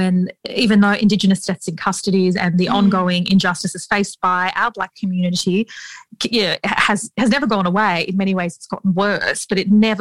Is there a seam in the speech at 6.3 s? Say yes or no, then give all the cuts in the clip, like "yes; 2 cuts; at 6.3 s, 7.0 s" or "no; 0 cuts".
no; 0 cuts